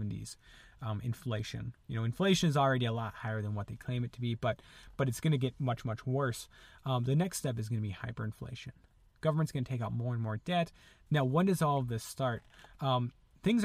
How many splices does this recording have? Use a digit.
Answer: 1